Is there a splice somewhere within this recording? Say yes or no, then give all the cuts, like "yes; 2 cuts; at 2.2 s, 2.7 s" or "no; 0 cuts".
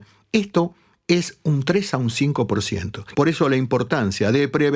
yes; 1 cut; at 3.1 s